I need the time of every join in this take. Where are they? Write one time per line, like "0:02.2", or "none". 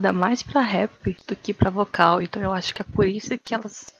none